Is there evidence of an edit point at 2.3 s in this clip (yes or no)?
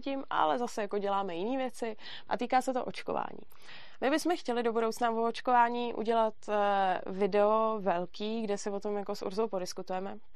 yes